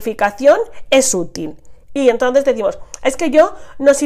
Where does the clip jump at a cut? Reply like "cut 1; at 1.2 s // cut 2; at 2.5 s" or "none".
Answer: cut 1; at 1.8 s